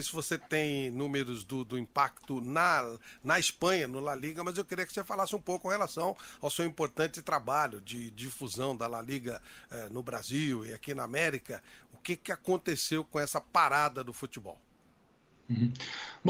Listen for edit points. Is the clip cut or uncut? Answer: uncut